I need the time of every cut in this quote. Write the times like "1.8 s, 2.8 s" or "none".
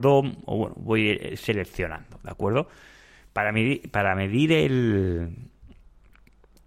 none